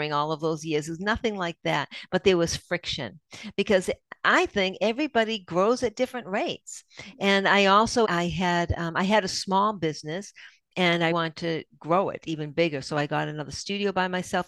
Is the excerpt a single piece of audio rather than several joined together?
no; 2 cuts; at 8.0 s, 11.1 s

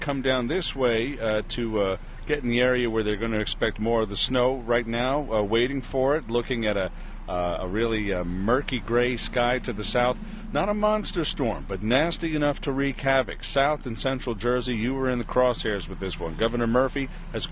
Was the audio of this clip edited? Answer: no; 0 cuts

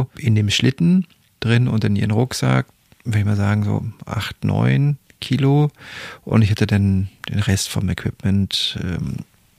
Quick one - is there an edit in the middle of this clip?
no; 0 cuts

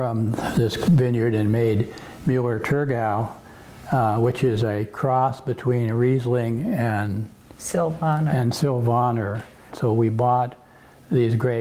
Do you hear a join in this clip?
yes; 1 cut; at 9.7 s

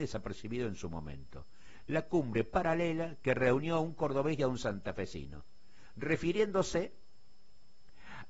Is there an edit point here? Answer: no; 0 cuts

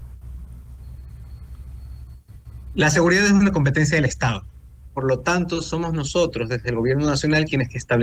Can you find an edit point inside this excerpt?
no; 0 cuts

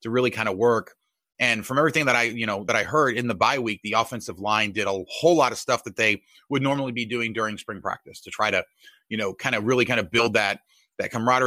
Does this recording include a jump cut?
no; 0 cuts

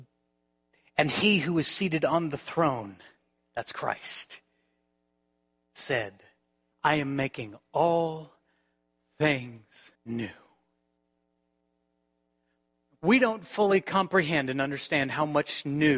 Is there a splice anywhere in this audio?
yes; 2 cuts; at 6.7 s, 9.9 s

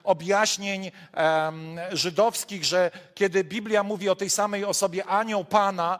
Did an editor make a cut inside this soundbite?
no; 0 cuts

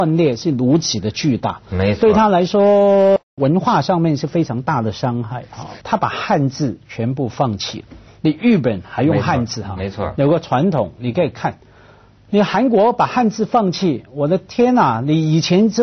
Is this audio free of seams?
no; 1 cut; at 5.8 s

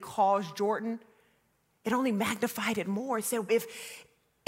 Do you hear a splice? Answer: yes; 1 cut; at 3.5 s

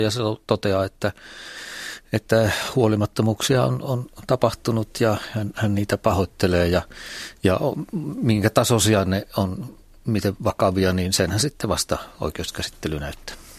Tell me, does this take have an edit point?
no; 0 cuts

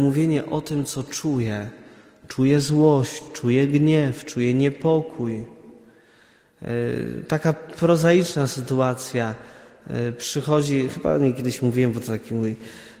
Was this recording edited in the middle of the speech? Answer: no; 0 cuts

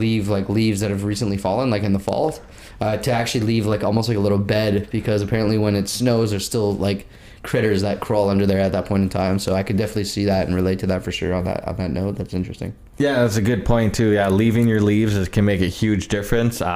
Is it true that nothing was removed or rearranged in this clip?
yes; 0 cuts

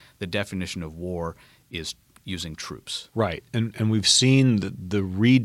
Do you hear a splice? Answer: no; 0 cuts

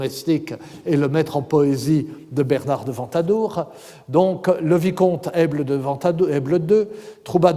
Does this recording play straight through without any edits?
yes; 0 cuts

